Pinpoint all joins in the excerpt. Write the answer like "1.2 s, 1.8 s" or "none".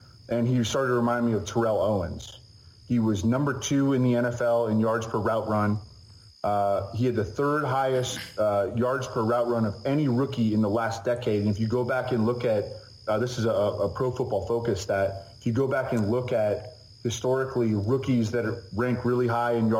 none